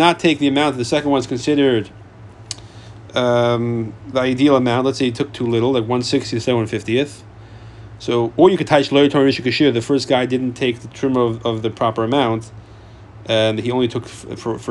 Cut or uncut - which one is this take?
uncut